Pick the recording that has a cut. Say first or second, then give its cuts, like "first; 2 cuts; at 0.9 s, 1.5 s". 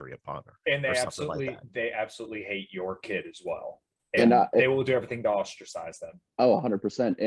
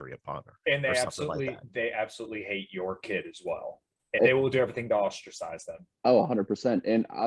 second; 1 cut; at 4.2 s